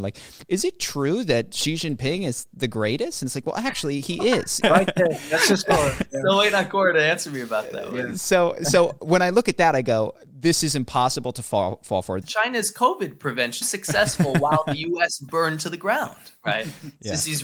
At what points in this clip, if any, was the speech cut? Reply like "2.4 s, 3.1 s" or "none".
4.6 s, 12.2 s, 13.6 s